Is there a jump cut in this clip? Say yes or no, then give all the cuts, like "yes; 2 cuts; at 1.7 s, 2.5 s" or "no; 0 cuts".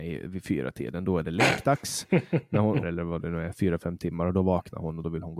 yes; 1 cut; at 2.8 s